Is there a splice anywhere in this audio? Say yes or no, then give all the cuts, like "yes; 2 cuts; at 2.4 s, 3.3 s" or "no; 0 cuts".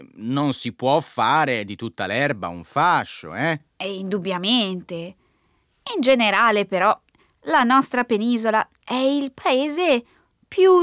no; 0 cuts